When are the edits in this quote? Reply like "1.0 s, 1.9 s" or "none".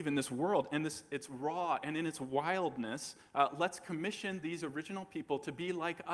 none